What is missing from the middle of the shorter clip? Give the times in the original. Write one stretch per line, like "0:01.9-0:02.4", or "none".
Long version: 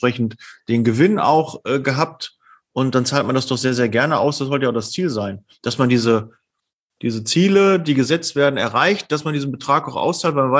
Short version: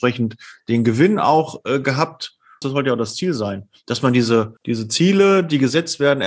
0:02.6-0:04.4
0:06.3-0:06.9

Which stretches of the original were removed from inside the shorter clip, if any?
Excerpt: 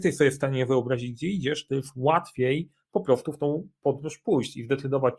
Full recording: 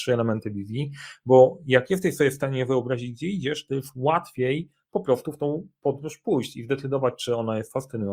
none

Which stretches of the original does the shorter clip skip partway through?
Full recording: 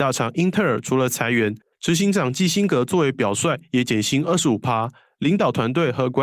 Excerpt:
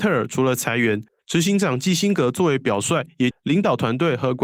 0:03.8-0:05.1

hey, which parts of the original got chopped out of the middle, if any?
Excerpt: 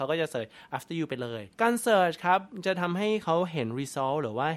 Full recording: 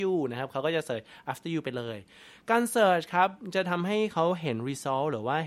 0:02.1-0:02.4

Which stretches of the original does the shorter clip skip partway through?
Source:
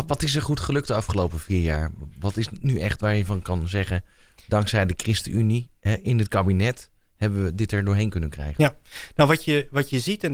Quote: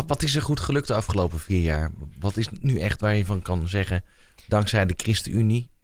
none

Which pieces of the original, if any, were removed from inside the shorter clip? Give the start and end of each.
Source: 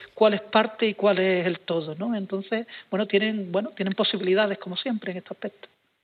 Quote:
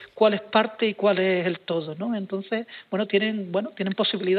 none

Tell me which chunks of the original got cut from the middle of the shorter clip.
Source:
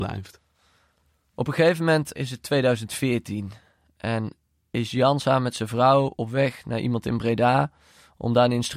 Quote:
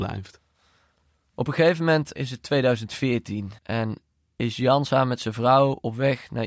0:03.6-0:03.9

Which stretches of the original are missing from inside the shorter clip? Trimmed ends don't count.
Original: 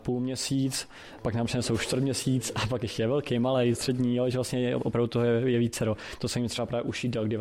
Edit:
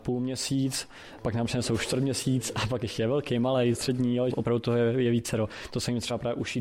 0:04.3-0:04.8

